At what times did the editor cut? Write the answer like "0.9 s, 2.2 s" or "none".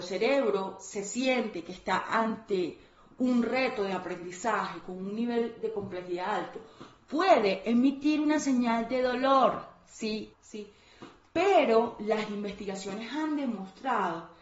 10.3 s